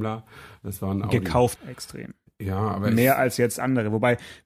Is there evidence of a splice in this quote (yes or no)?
yes